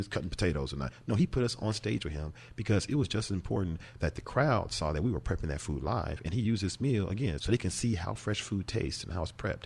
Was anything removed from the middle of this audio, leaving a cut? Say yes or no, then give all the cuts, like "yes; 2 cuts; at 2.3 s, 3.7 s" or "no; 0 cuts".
yes; 1 cut; at 7.4 s